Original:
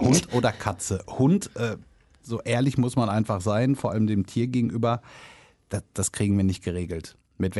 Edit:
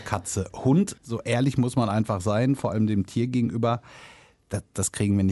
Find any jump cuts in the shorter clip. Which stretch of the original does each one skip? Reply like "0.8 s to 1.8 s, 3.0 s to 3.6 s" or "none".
1.5 s to 2.2 s